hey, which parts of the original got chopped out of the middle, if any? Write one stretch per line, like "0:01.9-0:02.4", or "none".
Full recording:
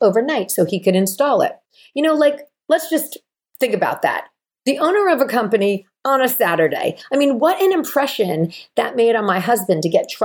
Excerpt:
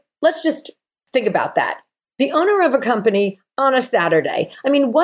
none